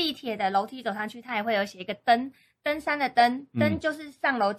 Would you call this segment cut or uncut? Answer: uncut